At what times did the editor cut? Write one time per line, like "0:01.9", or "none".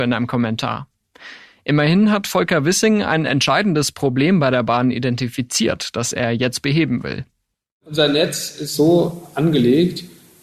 none